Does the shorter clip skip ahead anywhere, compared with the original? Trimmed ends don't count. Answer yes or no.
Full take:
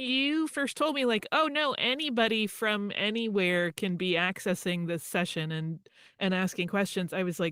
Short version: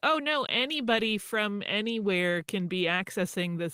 no